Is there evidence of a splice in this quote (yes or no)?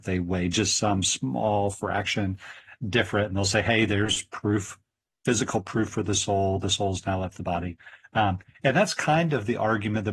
no